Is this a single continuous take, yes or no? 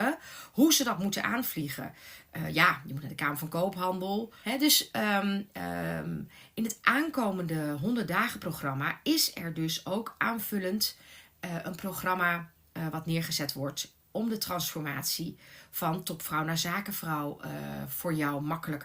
no